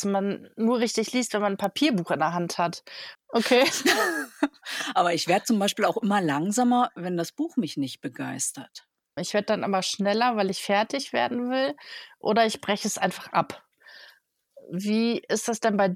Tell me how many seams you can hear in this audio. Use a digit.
2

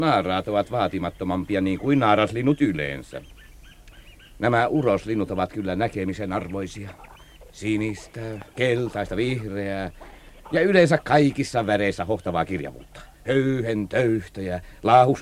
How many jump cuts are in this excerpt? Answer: 2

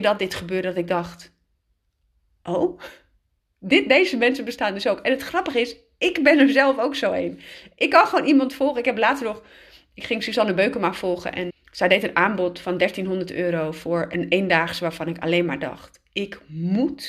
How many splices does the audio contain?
1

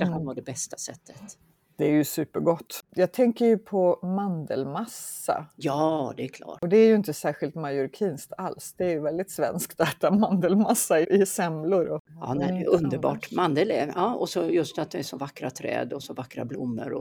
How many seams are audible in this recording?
1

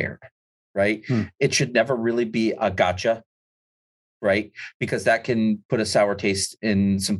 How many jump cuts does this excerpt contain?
1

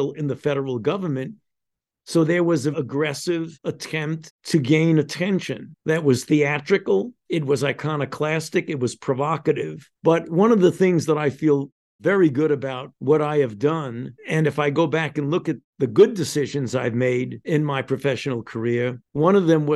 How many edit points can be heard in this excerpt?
1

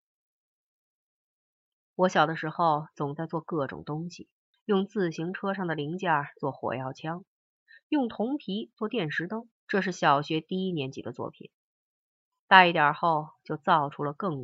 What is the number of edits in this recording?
2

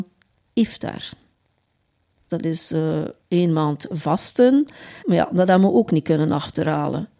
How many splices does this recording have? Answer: 2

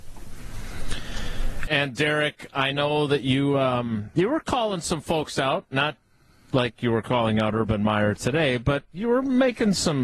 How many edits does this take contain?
1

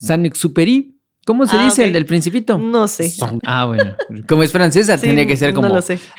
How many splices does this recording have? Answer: 1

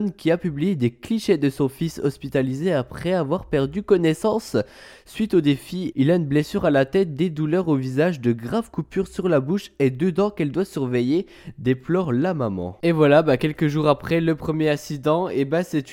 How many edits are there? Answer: 1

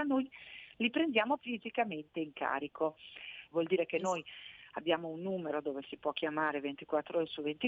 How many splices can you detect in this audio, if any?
2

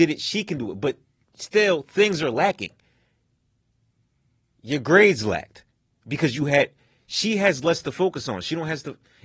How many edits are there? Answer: 0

